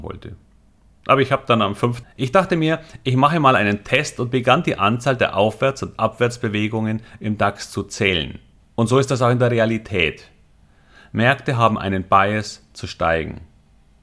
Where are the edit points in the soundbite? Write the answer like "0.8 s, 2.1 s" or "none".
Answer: 2.0 s, 8.6 s